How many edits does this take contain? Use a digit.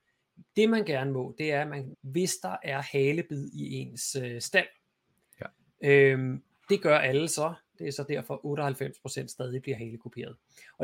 2